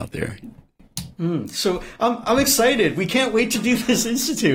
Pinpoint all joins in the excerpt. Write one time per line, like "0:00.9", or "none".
none